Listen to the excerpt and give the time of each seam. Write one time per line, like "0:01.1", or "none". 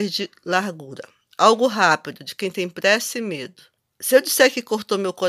none